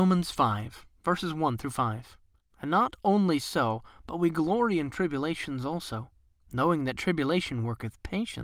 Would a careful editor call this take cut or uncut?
cut